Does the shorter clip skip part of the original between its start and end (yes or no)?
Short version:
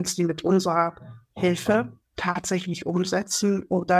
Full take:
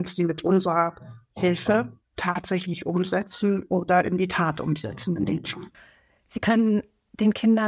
no